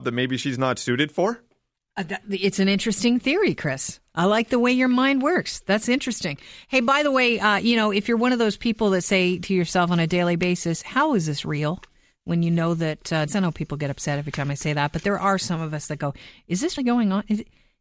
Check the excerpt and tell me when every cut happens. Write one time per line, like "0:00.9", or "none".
0:13.3
0:16.8